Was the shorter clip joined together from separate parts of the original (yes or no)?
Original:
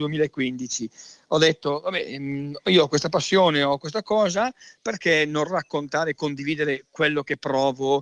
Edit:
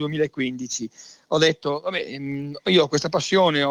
no